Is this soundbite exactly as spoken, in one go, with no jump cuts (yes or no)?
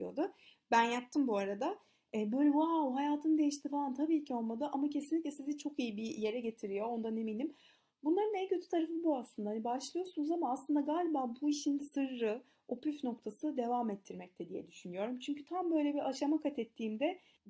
yes